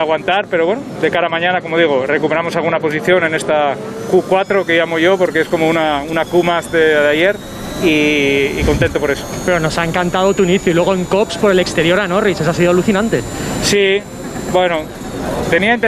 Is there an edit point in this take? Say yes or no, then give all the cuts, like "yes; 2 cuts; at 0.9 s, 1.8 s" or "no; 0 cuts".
no; 0 cuts